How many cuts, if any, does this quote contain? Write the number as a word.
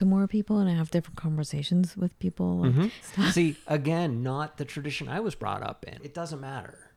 two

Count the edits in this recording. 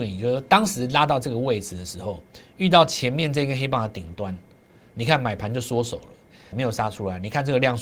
one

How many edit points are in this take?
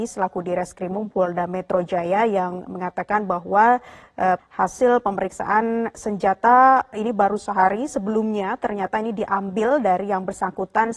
one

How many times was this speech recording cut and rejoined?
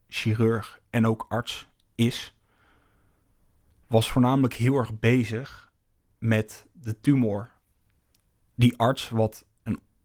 one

